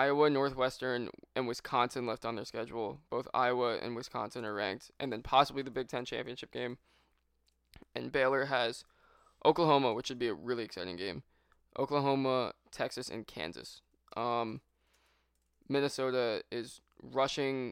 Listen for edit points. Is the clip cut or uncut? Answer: uncut